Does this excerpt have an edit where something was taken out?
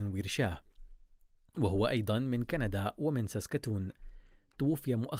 no; 0 cuts

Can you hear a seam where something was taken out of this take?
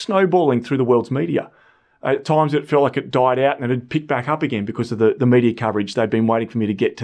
no; 0 cuts

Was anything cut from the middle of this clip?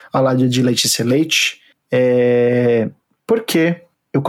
no; 0 cuts

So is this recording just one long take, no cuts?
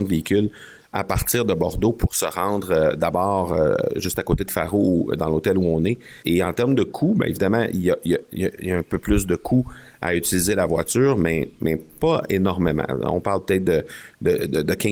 no; 1 cut; at 6.2 s

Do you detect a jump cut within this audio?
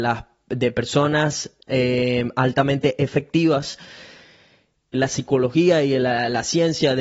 yes; 1 cut; at 4.9 s

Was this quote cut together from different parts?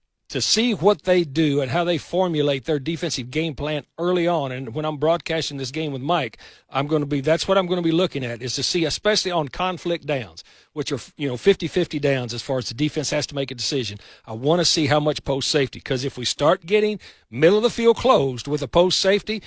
no; 0 cuts

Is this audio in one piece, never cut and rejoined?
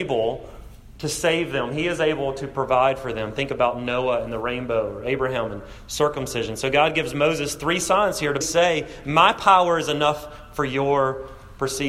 no; 1 cut; at 8.4 s

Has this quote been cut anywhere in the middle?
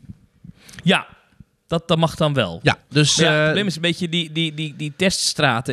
no; 0 cuts

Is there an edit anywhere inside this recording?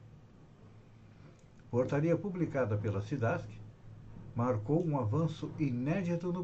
yes; 1 cut; at 1.6 s

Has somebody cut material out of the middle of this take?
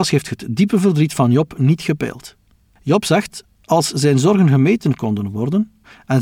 no; 0 cuts

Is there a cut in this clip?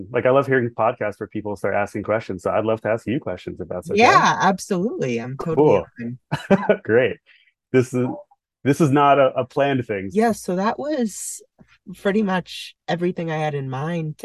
yes; 1 cut; at 10.1 s

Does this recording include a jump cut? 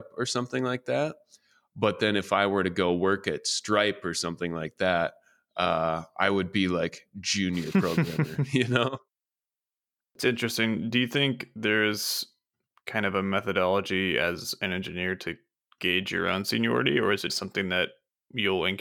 yes; 2 cuts; at 10.0 s, 17.3 s

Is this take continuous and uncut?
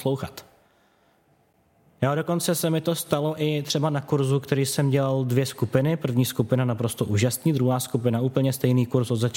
yes; 0 cuts

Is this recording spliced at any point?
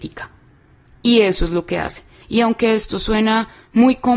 yes; 1 cut; at 2.2 s

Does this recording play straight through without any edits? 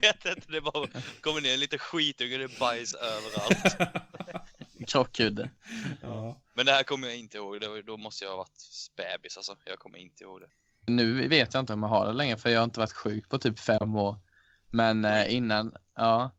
no; 1 cut; at 10.9 s

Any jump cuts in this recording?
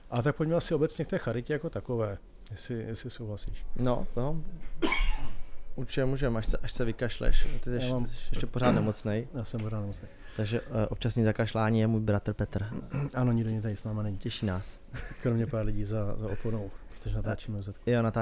no; 0 cuts

